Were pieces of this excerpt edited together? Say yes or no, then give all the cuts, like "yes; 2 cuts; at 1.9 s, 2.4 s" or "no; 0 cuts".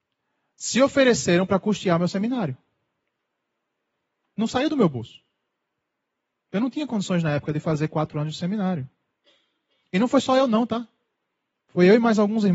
no; 0 cuts